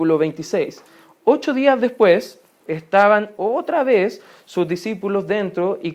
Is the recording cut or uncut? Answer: cut